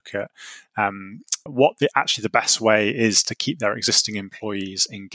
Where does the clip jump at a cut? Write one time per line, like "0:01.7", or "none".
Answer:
0:01.5